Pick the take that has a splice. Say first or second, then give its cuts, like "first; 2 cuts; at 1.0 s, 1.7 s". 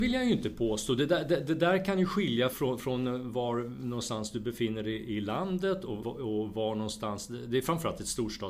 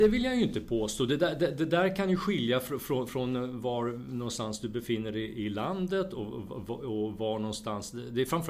first; 2 cuts; at 2.5 s, 6.0 s